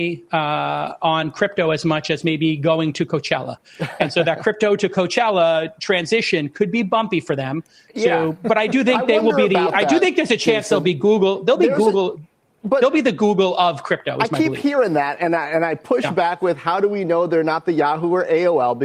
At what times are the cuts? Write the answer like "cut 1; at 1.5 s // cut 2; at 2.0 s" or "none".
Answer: none